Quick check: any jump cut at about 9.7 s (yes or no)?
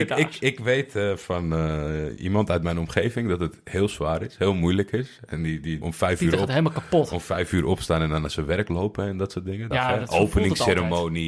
yes